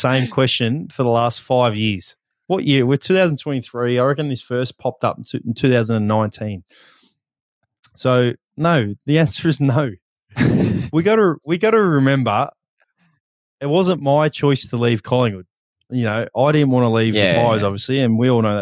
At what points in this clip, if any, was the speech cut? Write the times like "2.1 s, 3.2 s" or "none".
none